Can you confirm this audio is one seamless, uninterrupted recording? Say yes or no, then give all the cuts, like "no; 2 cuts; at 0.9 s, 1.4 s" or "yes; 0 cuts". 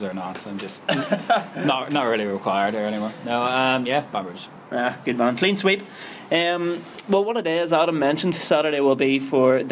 yes; 0 cuts